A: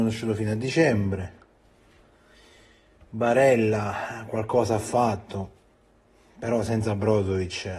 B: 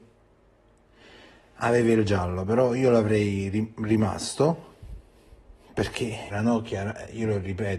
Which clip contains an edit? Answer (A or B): B